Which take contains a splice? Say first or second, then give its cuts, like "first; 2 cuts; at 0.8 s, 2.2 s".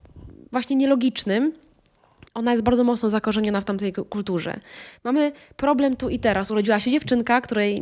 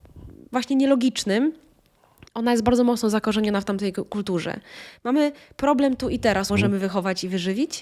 second; 1 cut; at 6.5 s